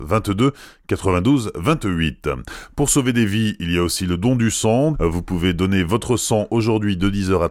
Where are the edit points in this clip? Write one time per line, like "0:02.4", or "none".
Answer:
0:04.9